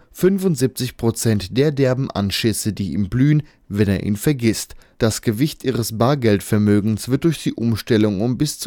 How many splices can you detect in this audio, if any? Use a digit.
1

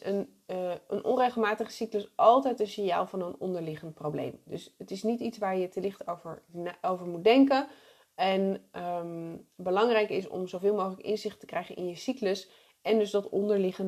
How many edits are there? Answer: 0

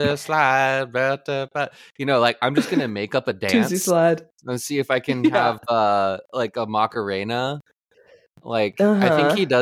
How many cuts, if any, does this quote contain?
0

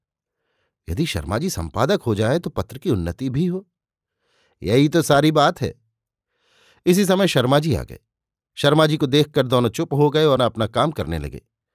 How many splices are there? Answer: 1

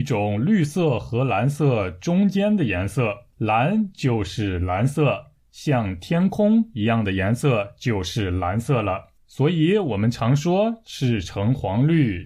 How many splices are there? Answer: 2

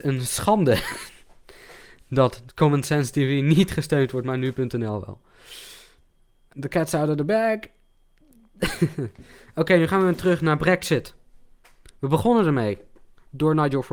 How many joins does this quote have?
1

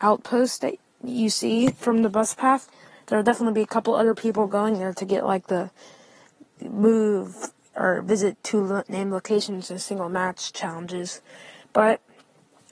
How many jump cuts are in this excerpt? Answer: 0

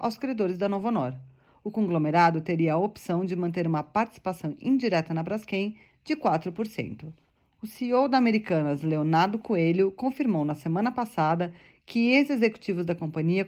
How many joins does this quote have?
0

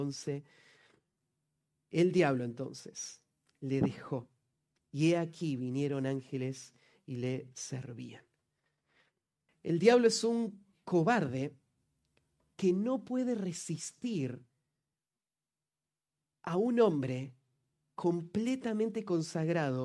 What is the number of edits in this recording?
1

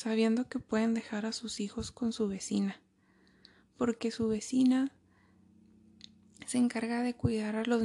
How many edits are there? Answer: 0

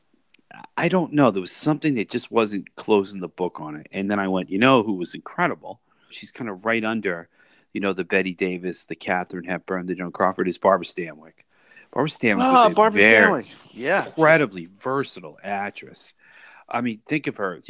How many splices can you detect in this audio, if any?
1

